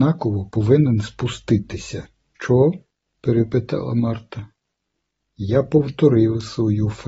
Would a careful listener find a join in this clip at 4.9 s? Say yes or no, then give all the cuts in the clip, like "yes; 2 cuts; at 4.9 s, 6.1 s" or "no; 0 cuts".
no; 1 cut; at 2.4 s